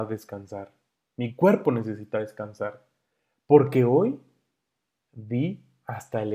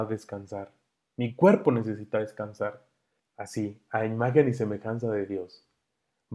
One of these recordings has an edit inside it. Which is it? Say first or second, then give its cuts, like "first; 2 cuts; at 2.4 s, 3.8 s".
second; 1 cut; at 3.2 s